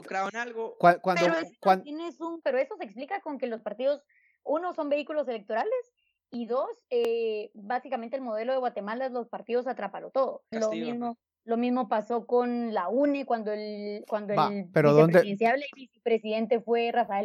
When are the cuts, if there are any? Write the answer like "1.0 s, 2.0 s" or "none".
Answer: 2.4 s, 10.5 s